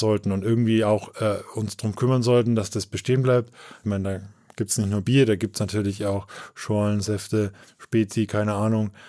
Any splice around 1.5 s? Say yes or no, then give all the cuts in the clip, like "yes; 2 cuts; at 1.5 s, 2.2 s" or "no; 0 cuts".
no; 2 cuts; at 3.8 s, 7.7 s